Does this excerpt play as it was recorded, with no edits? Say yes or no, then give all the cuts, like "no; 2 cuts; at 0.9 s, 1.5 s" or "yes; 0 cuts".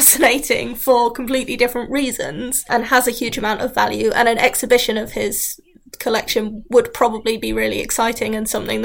yes; 0 cuts